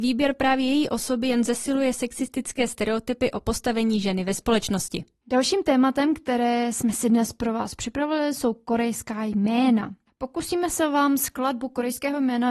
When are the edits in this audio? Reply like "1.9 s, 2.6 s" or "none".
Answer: none